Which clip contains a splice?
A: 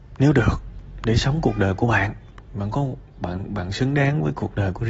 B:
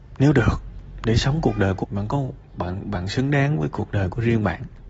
B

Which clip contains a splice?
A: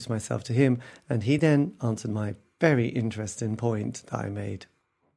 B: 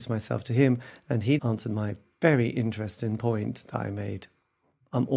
B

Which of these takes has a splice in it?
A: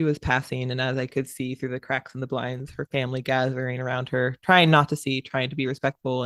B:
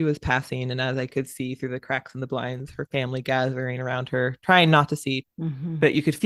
B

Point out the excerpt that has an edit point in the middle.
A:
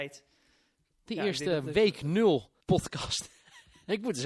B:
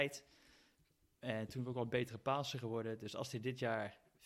A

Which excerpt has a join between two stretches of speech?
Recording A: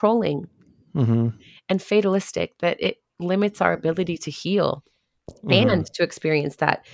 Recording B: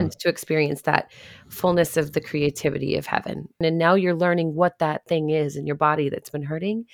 B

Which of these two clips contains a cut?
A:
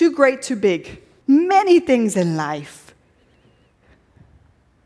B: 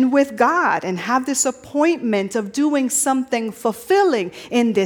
A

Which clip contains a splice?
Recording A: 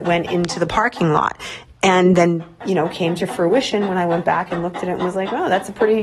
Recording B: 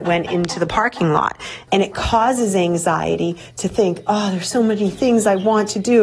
B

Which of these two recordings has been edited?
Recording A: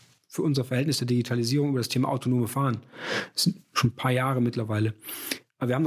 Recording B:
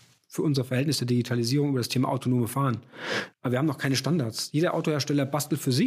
B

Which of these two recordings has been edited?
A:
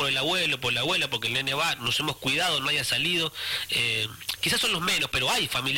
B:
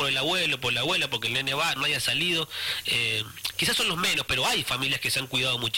B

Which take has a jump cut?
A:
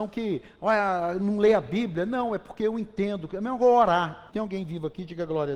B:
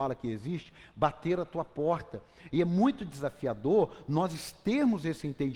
A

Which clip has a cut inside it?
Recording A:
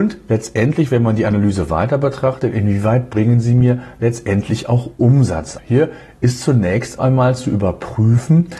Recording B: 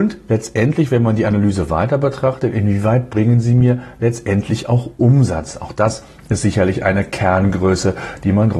A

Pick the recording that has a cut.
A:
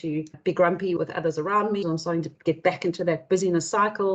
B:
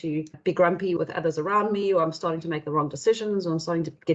A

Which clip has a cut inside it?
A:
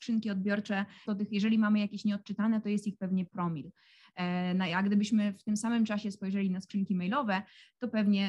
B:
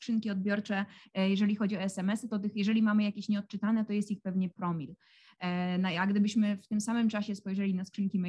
A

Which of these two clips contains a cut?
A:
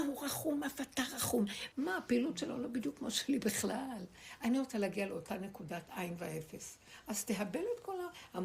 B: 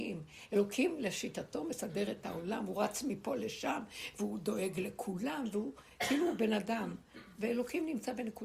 A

